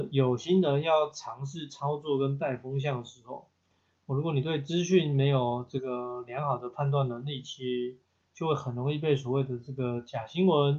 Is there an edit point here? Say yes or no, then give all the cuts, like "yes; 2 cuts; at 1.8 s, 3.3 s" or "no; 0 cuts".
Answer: no; 0 cuts